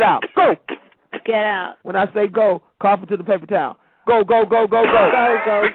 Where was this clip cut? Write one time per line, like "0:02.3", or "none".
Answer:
0:01.8
0:04.0